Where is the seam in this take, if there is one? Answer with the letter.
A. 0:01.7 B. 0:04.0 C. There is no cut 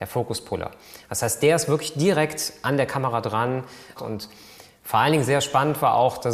B